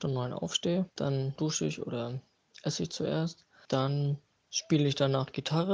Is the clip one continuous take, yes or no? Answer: yes